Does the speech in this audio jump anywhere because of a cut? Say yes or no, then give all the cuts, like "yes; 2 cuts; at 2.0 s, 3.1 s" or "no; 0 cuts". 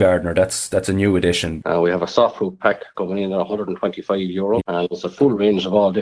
yes; 2 cuts; at 1.6 s, 4.6 s